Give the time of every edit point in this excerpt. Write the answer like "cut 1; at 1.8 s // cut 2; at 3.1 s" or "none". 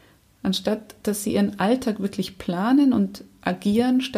none